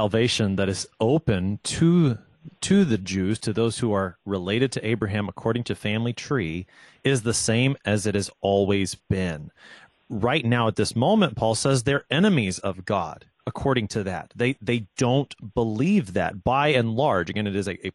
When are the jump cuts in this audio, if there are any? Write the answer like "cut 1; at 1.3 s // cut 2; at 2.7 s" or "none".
none